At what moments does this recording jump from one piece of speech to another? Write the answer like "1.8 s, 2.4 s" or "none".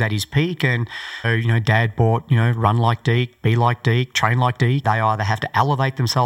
1.2 s, 4.8 s